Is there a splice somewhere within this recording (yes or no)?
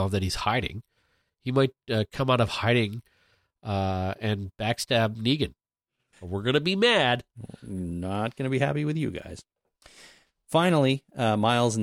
yes